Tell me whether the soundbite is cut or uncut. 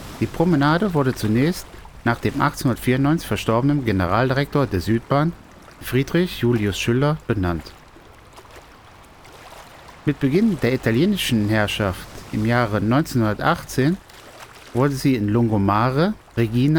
uncut